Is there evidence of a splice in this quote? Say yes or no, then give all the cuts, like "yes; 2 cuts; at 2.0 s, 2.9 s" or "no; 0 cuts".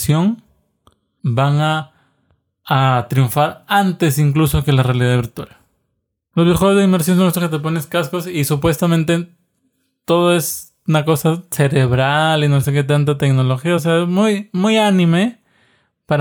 no; 0 cuts